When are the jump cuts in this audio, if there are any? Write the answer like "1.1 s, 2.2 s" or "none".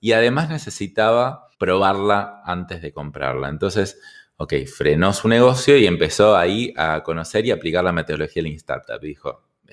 1.5 s